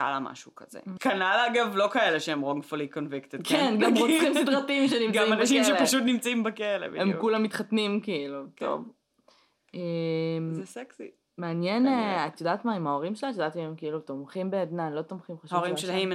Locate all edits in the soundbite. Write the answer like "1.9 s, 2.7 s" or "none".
1.0 s